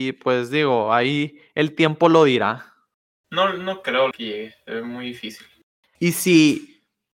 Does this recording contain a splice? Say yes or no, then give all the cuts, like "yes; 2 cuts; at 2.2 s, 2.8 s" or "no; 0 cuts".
yes; 2 cuts; at 4.1 s, 5.9 s